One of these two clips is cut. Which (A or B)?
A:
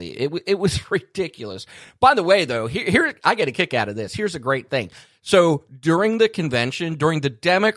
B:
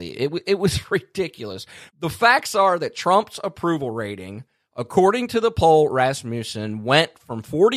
B